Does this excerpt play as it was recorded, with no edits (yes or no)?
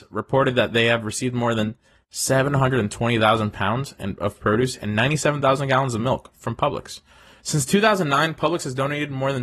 no